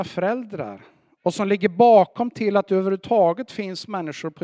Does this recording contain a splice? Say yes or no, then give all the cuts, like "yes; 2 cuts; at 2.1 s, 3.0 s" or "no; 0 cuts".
no; 0 cuts